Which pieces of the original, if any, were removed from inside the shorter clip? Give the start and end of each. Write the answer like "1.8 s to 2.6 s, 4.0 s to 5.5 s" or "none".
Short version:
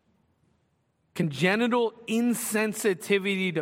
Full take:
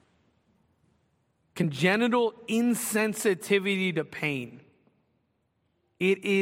none